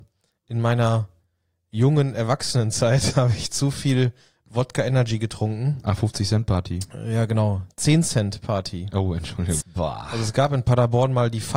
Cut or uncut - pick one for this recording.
cut